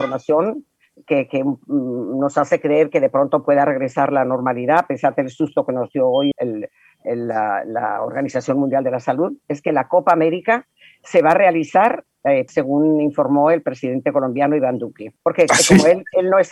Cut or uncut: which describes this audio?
cut